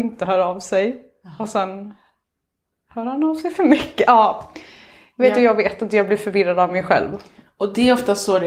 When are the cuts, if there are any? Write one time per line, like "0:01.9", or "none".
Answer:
none